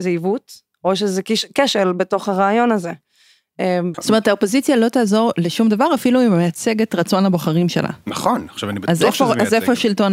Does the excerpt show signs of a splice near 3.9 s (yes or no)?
yes